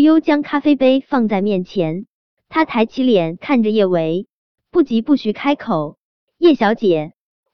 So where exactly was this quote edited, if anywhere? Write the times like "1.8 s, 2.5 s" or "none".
none